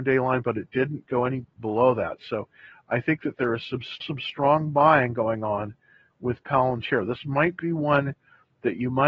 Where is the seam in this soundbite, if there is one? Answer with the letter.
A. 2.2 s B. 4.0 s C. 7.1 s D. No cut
B